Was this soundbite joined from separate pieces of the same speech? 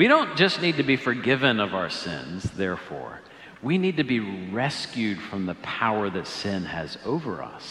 no; 0 cuts

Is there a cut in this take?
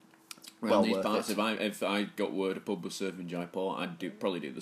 no; 0 cuts

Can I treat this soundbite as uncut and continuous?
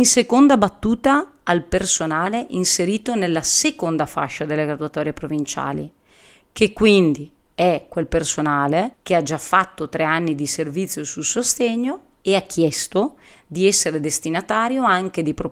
no; 1 cut; at 8.9 s

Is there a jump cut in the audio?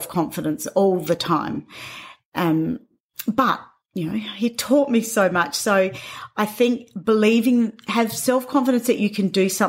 no; 0 cuts

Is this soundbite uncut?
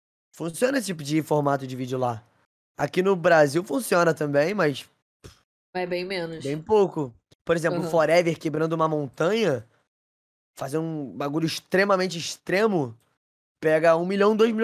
yes; 0 cuts

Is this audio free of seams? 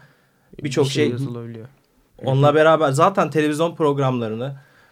no; 1 cut; at 2.1 s

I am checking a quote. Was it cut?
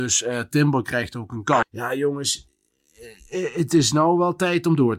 yes; 1 cut; at 1.6 s

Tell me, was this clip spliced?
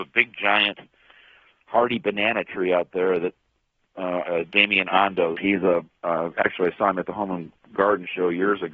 yes; 2 cuts; at 4.2 s, 5.3 s

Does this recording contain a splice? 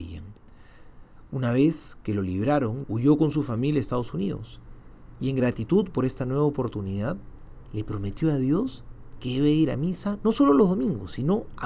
yes; 1 cut; at 2.8 s

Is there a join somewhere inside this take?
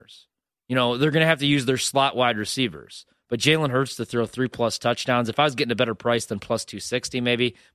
no; 0 cuts

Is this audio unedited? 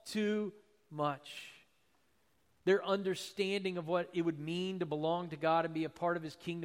no; 1 cut; at 2.5 s

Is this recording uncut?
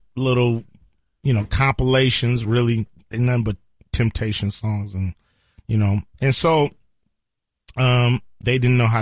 yes; 0 cuts

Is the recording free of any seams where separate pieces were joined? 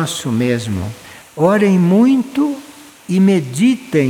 no; 1 cut; at 1.2 s

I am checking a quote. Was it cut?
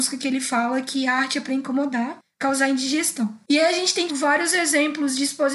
yes; 1 cut; at 4.1 s

